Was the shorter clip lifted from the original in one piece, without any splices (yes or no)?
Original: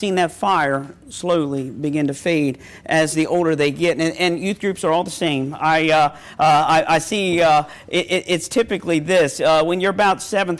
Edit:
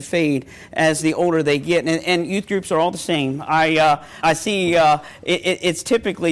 no